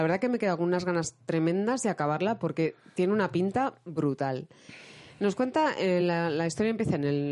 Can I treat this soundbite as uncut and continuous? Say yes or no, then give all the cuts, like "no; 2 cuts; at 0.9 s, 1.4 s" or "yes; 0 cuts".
yes; 0 cuts